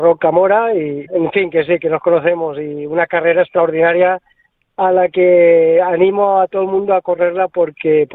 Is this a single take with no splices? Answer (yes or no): no